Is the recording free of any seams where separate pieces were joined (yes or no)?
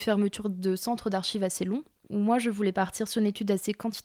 yes